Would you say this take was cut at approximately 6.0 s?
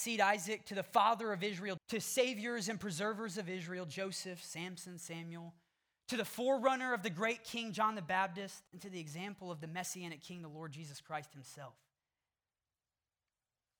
no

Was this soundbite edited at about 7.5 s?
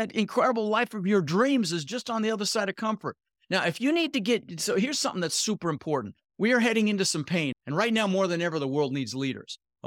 yes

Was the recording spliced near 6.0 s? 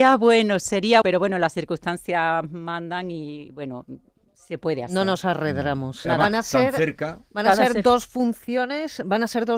yes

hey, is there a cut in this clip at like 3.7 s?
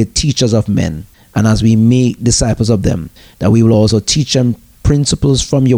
no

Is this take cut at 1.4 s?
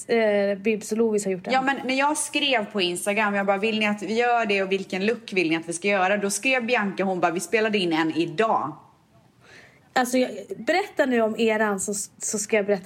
no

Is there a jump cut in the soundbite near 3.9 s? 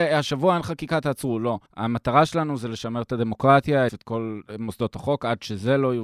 yes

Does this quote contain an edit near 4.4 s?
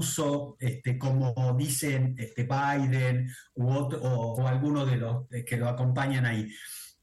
yes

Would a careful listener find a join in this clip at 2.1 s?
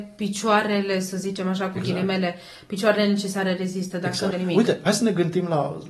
no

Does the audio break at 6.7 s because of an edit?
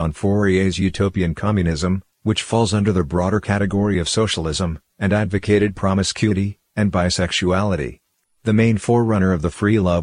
yes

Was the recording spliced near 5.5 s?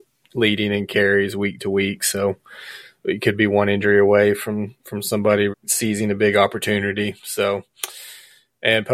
yes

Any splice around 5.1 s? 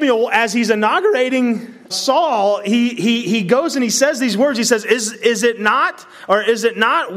yes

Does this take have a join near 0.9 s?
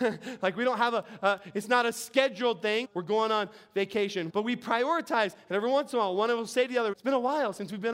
no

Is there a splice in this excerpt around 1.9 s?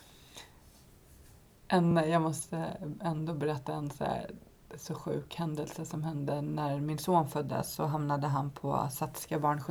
no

